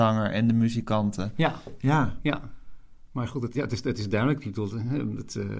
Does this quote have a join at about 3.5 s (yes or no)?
yes